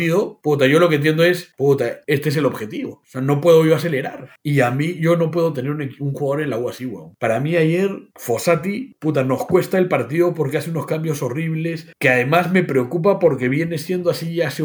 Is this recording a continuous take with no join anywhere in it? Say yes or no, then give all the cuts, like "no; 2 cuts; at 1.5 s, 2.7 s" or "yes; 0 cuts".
yes; 0 cuts